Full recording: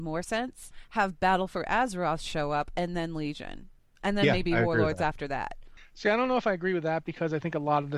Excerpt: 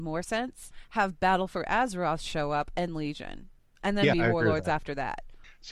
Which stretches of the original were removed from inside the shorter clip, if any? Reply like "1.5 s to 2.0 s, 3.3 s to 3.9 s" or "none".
2.9 s to 3.1 s, 4.3 s to 4.5 s